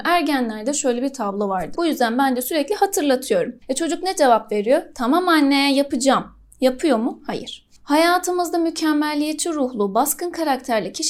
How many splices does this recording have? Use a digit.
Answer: 1